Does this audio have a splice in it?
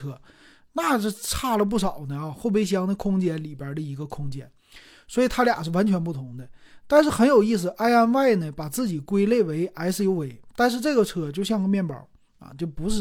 no; 0 cuts

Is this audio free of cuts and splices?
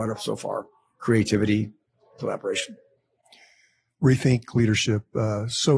yes; 0 cuts

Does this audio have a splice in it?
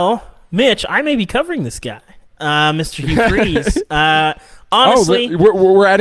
no; 0 cuts

